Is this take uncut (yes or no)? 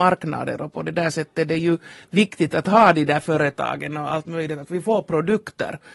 yes